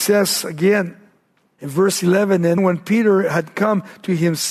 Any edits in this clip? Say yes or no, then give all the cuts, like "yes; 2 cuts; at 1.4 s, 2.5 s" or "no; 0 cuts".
yes; 1 cut; at 2.6 s